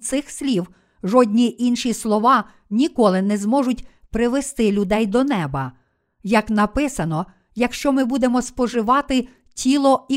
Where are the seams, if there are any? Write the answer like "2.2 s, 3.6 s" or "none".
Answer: none